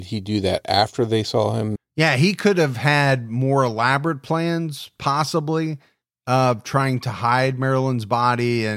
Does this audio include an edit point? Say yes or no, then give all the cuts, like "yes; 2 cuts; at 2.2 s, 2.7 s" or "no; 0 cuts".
yes; 1 cut; at 1.8 s